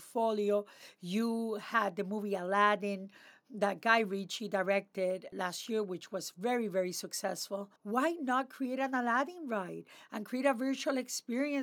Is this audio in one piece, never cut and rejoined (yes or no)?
no